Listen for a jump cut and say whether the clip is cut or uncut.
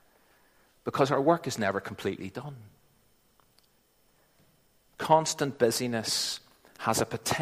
uncut